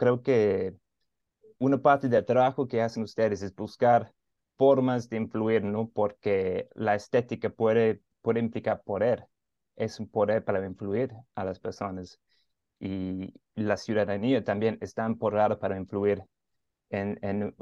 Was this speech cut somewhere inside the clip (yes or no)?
no